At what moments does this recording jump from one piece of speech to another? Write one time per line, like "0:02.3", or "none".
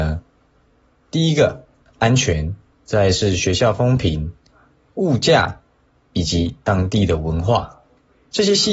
0:02.7